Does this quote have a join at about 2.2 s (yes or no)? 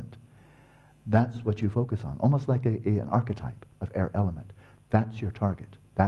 no